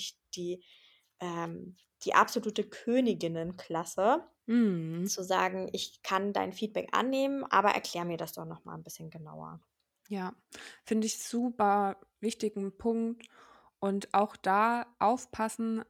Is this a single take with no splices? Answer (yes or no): no